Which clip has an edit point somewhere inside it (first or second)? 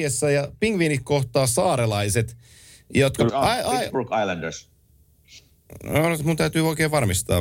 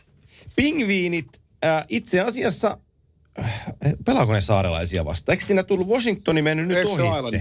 first